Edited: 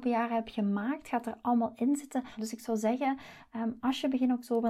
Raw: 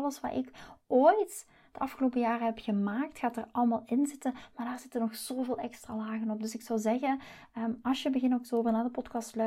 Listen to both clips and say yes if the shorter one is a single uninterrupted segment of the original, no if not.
no